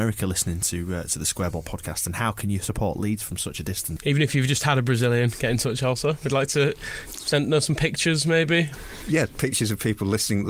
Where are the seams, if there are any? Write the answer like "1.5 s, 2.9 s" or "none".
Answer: 4.0 s, 8.7 s